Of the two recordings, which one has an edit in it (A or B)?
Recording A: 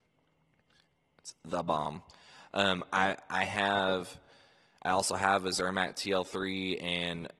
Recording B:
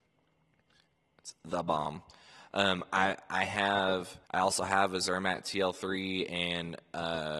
B